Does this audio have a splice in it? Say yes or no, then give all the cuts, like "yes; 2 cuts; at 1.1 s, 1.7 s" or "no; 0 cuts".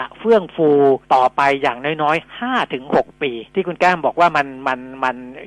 yes; 2 cuts; at 1.0 s, 3.5 s